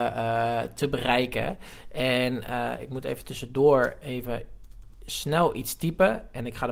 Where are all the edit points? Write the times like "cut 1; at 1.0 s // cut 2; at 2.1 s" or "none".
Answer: none